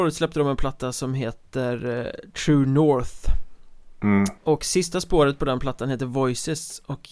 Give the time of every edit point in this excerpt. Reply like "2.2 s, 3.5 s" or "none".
4.4 s